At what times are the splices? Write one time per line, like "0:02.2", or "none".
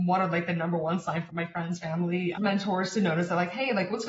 0:01.3
0:02.3